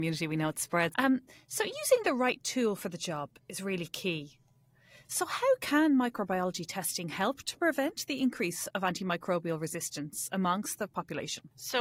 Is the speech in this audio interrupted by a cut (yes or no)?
yes